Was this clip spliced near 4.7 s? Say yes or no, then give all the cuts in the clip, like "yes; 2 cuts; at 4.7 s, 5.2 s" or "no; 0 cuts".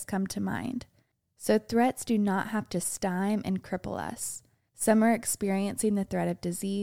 yes; 1 cut; at 4.7 s